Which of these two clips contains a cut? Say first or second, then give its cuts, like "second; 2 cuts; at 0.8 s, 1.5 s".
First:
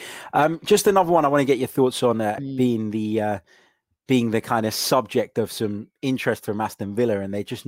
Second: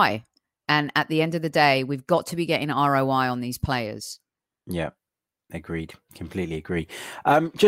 first; 1 cut; at 2.4 s